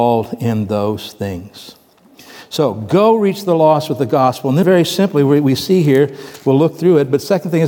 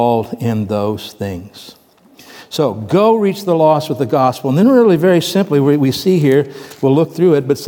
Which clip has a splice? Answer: first; 1 cut; at 4.6 s

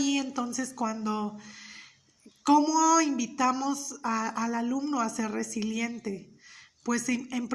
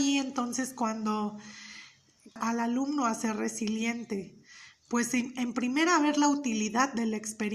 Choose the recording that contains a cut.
second; 1 cut; at 2.4 s

